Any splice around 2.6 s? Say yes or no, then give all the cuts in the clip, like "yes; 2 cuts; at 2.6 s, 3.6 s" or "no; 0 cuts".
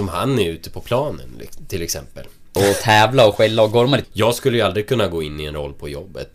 yes; 2 cuts; at 2.6 s, 4.0 s